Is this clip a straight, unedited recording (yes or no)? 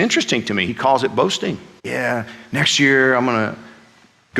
no